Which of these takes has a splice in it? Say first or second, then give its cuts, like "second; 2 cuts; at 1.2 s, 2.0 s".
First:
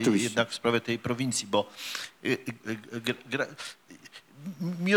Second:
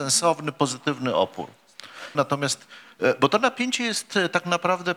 second; 1 cut; at 2.1 s